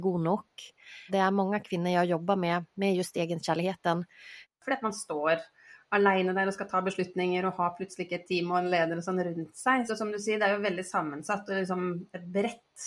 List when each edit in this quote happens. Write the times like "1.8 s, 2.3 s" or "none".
1.1 s, 4.4 s, 9.9 s